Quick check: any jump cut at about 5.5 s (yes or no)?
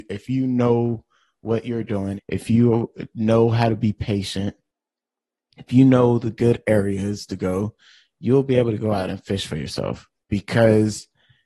no